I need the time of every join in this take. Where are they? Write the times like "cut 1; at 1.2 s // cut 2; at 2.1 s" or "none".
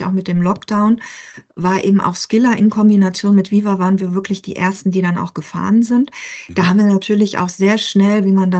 none